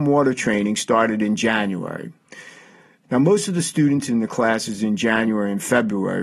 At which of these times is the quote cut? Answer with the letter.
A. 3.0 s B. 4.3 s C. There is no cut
A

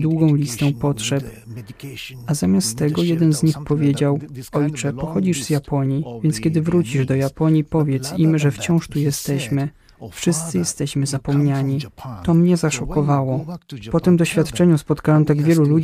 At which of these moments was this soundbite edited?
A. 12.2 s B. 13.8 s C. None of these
C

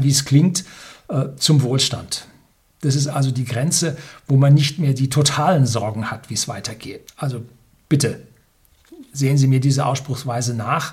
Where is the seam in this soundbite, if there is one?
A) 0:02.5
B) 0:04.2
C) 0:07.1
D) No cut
C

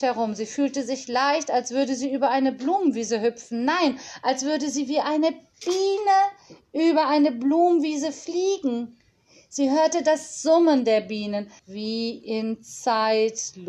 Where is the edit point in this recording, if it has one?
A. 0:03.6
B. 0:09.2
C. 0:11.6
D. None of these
C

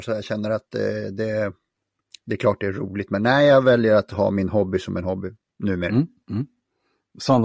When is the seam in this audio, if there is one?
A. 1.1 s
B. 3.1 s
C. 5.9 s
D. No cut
D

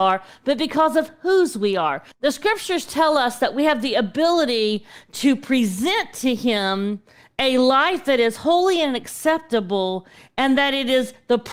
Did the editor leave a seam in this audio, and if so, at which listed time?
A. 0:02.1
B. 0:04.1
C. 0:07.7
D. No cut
A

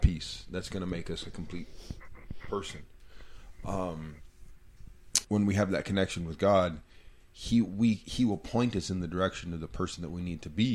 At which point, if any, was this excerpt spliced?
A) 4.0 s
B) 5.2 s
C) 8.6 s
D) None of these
B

